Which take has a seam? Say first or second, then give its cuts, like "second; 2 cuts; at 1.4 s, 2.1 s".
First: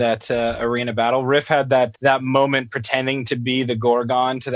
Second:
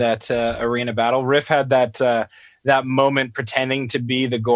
first; 1 cut; at 1.9 s